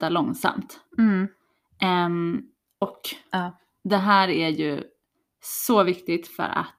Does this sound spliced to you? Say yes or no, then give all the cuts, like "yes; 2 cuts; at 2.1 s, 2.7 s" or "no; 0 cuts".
yes; 1 cut; at 2.8 s